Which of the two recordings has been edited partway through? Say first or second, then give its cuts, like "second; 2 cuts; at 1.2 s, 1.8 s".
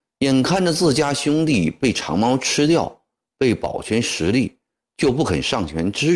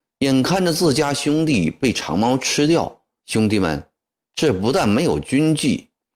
second; 1 cut; at 3.2 s